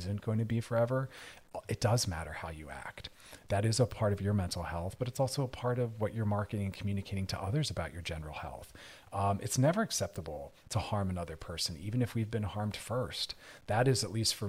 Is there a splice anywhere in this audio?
no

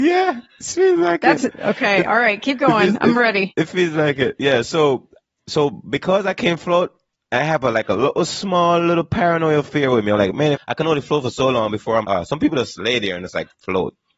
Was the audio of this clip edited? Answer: yes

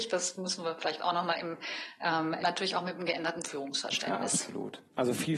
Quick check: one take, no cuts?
no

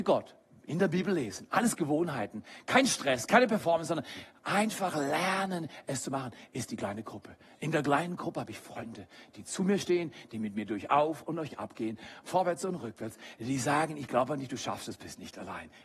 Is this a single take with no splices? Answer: yes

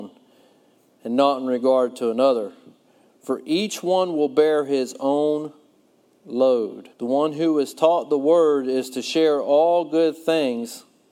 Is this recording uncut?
no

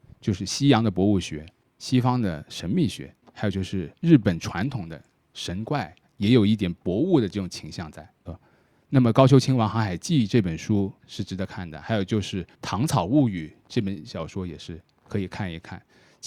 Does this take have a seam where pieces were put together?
yes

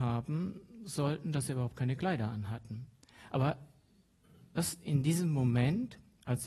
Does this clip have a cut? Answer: no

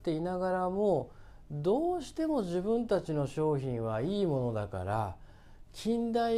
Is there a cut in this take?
no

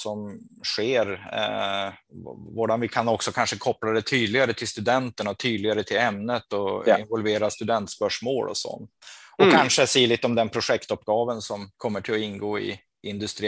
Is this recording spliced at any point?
yes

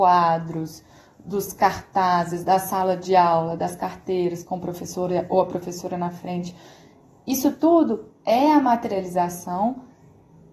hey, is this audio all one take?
yes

